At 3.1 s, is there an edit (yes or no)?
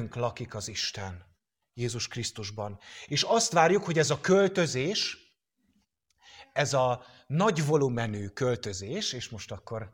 yes